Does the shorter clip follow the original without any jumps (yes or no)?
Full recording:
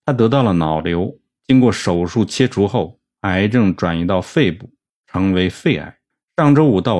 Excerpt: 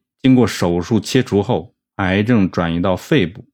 yes